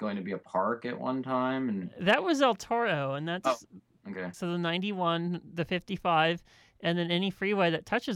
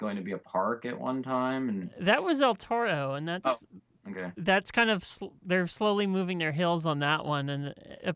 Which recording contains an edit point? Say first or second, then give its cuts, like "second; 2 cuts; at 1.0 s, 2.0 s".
first; 1 cut; at 4.3 s